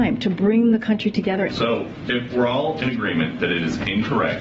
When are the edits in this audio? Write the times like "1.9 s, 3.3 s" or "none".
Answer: 1.5 s